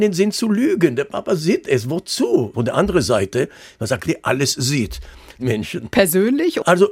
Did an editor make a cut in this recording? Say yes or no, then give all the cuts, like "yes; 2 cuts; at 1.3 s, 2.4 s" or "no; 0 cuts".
yes; 3 cuts; at 2.5 s, 4.1 s, 5.4 s